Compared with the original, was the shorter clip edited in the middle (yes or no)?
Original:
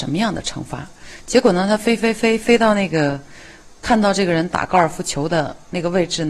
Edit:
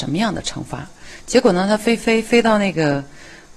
yes